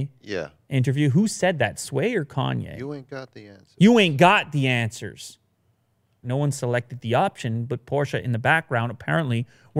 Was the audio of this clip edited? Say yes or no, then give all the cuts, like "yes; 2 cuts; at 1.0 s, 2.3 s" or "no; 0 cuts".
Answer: yes; 1 cut; at 6.2 s